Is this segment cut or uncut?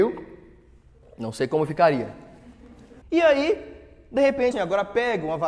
cut